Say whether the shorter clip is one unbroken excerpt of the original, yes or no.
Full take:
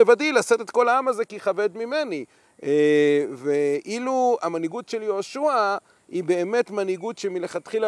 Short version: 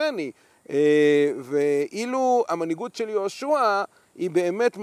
yes